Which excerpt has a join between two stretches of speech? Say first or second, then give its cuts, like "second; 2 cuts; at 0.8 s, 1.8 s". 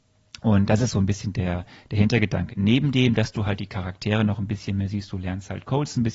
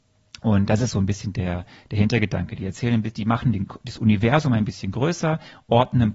first; 1 cut; at 2.5 s